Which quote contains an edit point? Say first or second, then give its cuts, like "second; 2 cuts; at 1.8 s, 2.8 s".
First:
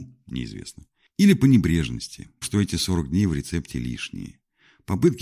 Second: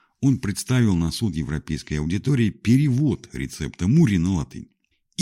first; 1 cut; at 2.4 s